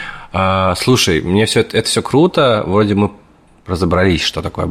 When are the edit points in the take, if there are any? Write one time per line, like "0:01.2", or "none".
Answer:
none